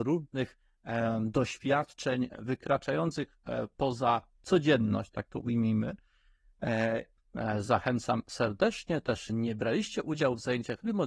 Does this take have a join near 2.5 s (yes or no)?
no